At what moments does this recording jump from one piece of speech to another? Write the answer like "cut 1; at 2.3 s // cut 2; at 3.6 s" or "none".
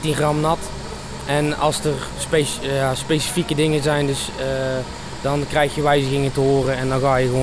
cut 1; at 5.2 s